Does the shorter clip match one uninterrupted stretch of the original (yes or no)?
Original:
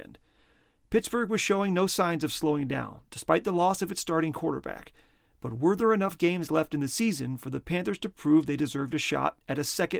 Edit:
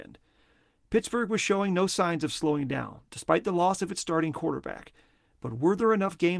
yes